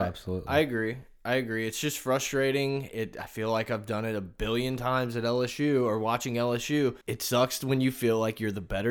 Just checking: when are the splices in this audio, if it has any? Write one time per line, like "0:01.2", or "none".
0:07.0